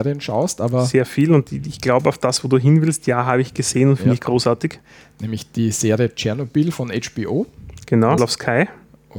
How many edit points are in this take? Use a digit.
1